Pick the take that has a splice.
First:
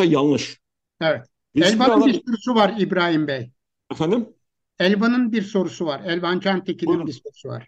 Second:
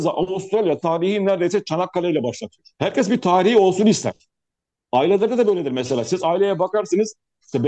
second; 1 cut; at 2.7 s

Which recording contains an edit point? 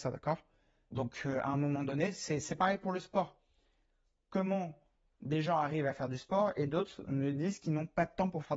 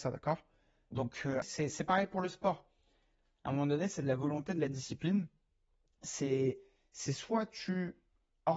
second; 2 cuts; at 1.4 s, 3.2 s

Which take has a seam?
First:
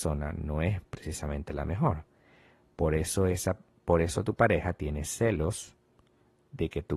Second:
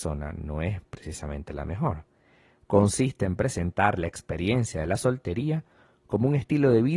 second; 1 cut; at 2.6 s

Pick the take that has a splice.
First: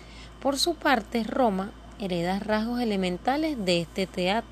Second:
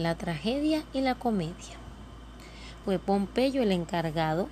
second; 1 cut; at 2.8 s

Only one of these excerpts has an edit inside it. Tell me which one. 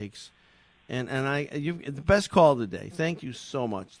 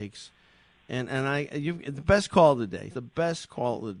second; 1 cut; at 2.9 s

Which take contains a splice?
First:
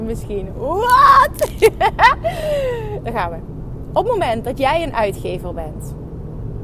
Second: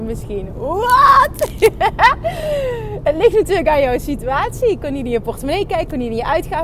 first; 1 cut; at 3.0 s

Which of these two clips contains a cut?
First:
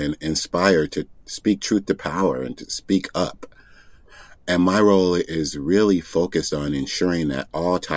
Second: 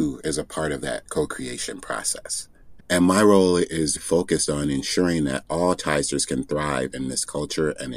second; 2 cuts; at 2.8 s, 4.0 s

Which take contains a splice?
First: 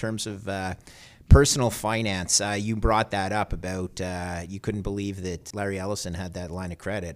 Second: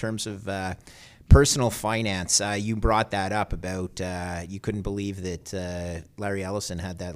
first; 1 cut; at 5.5 s

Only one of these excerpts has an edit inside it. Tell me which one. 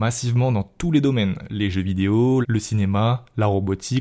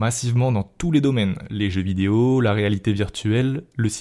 first; 1 cut; at 2.4 s

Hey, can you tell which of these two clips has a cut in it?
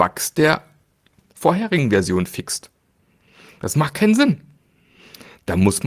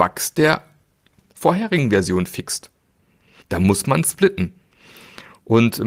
second; 1 cut; at 3.4 s

